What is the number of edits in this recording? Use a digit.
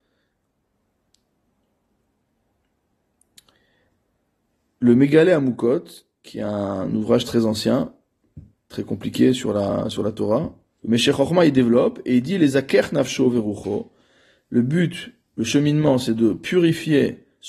1